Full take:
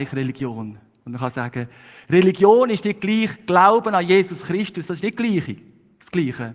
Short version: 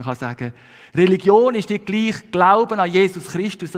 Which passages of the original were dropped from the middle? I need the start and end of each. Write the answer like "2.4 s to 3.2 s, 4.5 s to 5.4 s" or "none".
none